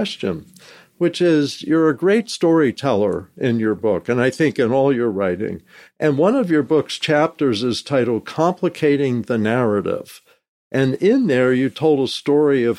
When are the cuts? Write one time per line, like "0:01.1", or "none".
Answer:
none